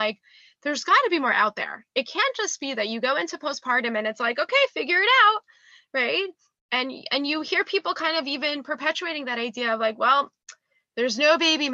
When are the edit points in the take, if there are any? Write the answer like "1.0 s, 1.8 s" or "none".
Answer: none